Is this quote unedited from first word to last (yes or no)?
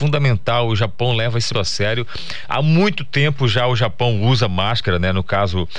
no